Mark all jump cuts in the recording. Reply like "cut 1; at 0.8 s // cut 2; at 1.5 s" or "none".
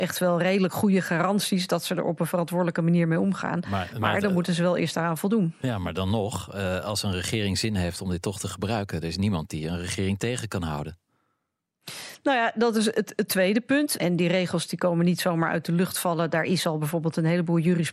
cut 1; at 14.0 s

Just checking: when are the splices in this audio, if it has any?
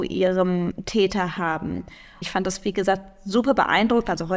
cut 1; at 2.2 s

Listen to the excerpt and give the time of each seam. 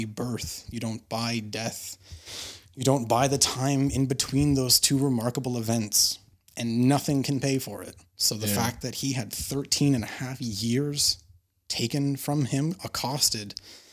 none

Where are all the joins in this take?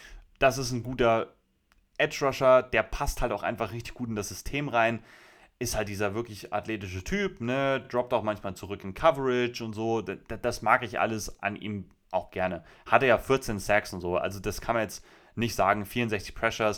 none

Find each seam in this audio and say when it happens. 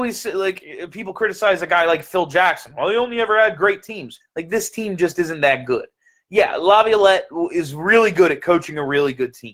cut 1; at 4.2 s

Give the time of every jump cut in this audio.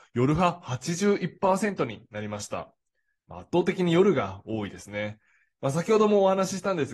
none

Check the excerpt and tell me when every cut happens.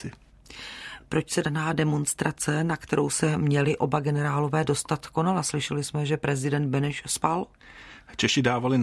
none

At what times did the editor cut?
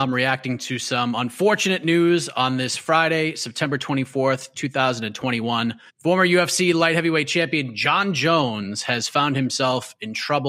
cut 1; at 5.9 s

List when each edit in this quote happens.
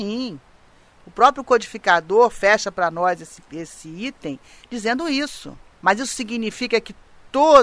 cut 1; at 5.8 s

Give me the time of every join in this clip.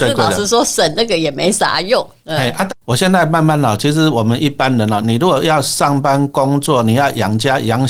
cut 1; at 2.7 s // cut 2; at 5.0 s

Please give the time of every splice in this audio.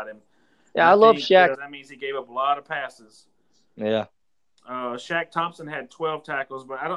cut 1; at 1.5 s

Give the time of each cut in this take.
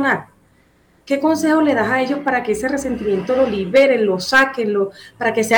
none

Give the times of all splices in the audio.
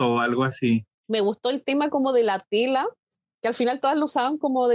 cut 1; at 0.9 s

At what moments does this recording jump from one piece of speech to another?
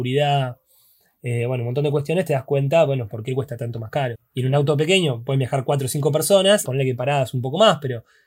cut 1; at 4.1 s // cut 2; at 6.7 s

